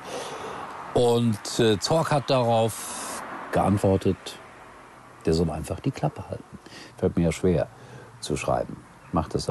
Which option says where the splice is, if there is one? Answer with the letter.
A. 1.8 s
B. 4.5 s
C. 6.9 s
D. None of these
C